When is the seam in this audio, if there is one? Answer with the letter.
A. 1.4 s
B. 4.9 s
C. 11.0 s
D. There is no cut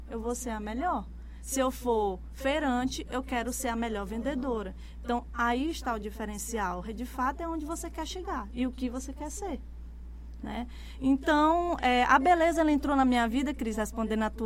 D